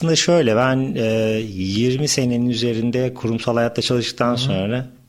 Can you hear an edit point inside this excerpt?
no; 0 cuts

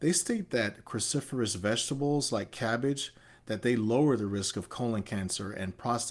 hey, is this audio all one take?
yes; 0 cuts

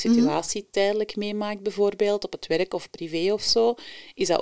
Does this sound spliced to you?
no; 0 cuts

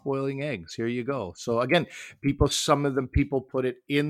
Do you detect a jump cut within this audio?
no; 0 cuts

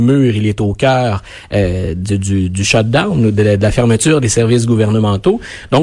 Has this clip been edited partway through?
no; 0 cuts

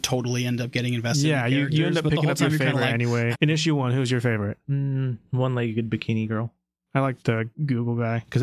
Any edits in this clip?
yes; 1 cut; at 3.3 s

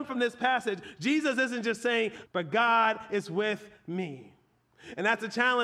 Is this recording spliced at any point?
yes; 1 cut; at 2.2 s

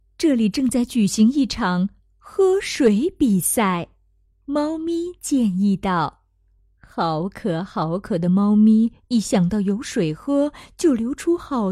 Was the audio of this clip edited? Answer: yes; 1 cut; at 4.3 s

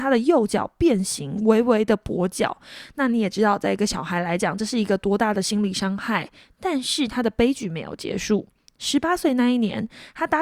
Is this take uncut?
yes; 0 cuts

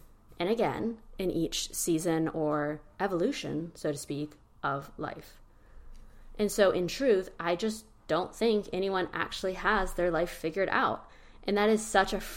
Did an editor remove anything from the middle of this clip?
no; 0 cuts

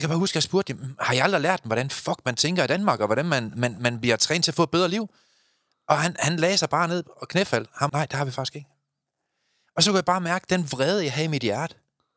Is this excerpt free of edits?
no; 1 cut; at 7.9 s

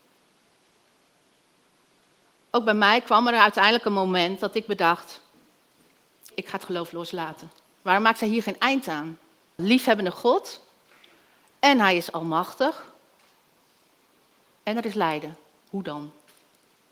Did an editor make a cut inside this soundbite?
yes; 3 cuts; at 6.3 s, 7.7 s, 9.6 s

